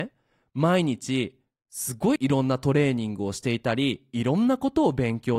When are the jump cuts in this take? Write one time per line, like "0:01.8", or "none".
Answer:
0:02.2